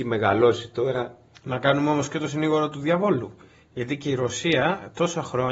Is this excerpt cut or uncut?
cut